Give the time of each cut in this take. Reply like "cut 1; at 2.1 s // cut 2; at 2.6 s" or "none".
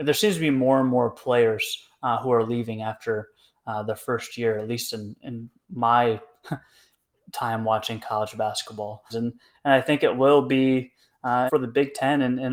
cut 1; at 9.1 s // cut 2; at 11.5 s